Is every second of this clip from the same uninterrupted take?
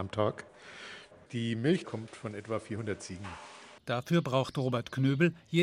no; 2 cuts; at 1.8 s, 3.8 s

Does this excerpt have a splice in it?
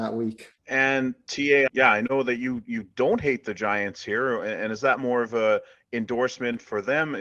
yes; 1 cut; at 1.7 s

